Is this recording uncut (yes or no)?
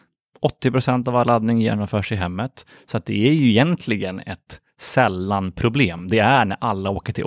yes